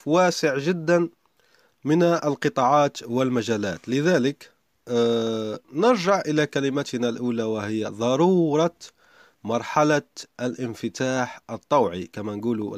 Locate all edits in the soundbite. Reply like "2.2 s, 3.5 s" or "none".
5.6 s